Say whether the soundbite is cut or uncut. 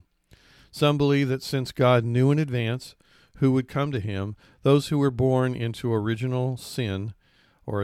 uncut